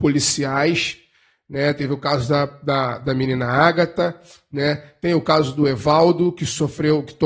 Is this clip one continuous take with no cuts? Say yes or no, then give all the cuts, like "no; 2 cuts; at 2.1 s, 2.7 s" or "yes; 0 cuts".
yes; 0 cuts